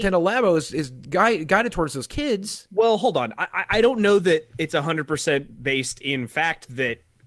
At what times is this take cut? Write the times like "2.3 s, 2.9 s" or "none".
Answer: none